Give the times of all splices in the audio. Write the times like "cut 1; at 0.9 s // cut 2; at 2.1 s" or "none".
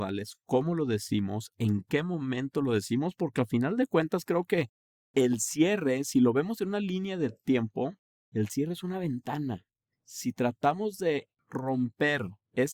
none

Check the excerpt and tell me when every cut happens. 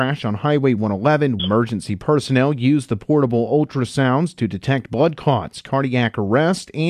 cut 1; at 1.4 s

